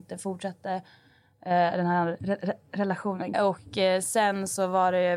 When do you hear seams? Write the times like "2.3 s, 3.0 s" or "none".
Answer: 3.3 s